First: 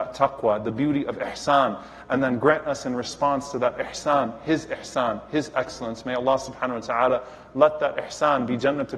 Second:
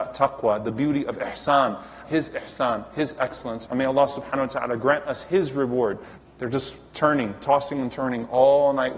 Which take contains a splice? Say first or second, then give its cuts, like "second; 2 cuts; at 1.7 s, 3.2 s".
second; 3 cuts; at 2.0 s, 3.7 s, 6.2 s